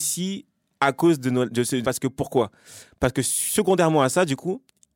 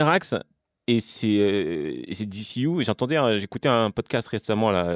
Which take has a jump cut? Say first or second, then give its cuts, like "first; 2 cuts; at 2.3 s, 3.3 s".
first; 1 cut; at 1.8 s